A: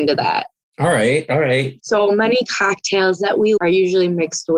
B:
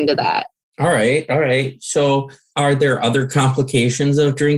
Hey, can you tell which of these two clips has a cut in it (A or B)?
A